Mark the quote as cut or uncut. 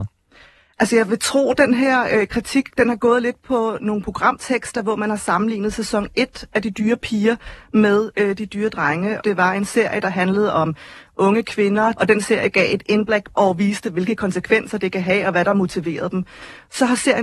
cut